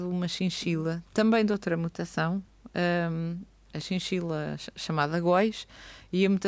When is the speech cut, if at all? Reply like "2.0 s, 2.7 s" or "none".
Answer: none